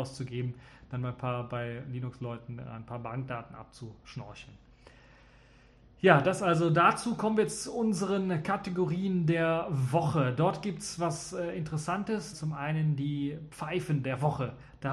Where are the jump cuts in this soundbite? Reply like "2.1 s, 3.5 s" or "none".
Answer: 12.3 s

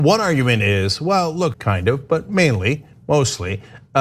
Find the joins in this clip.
1.5 s

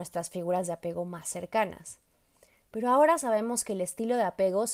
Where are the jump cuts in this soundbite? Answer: none

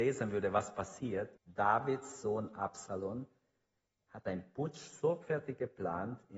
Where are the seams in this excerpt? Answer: 1.4 s

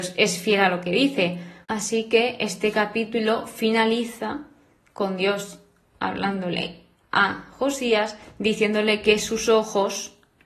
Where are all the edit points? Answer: 1.6 s

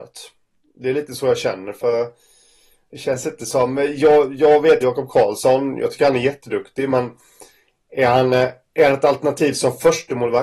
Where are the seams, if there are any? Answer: 4.8 s

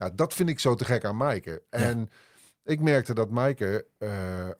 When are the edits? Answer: none

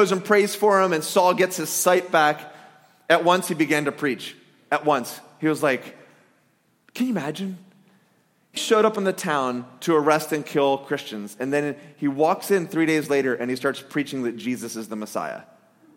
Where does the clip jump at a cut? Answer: 8.6 s

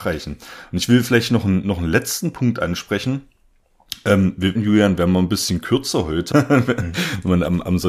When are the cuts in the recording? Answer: 4.5 s, 6.3 s

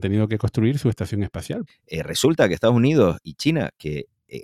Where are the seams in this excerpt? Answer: 1.7 s, 3.2 s

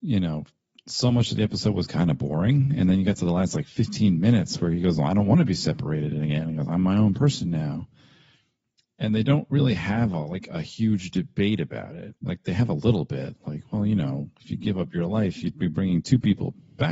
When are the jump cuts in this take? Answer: 12.2 s

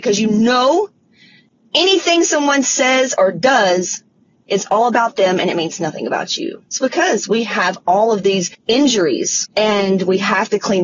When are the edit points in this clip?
6.7 s

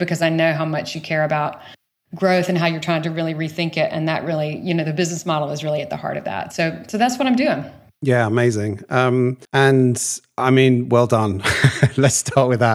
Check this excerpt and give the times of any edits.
9.5 s

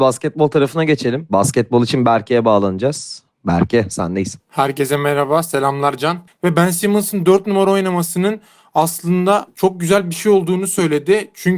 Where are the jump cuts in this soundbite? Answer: 6.3 s

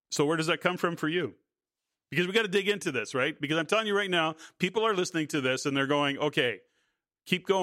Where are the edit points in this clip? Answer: none

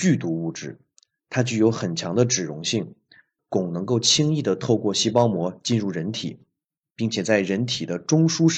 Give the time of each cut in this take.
3.4 s

